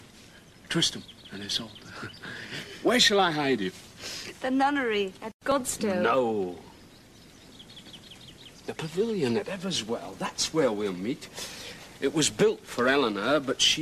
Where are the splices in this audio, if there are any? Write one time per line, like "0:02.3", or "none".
none